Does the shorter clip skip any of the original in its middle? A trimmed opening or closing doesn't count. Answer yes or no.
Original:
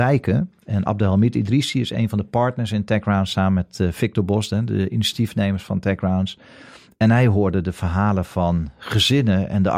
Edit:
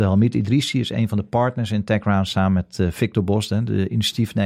no